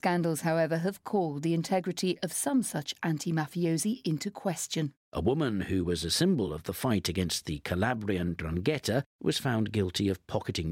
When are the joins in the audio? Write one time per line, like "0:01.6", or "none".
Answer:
none